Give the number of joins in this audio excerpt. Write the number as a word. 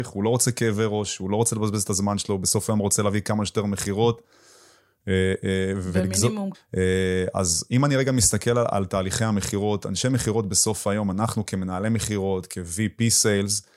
one